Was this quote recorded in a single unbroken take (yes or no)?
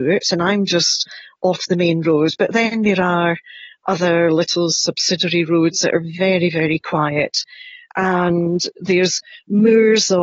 yes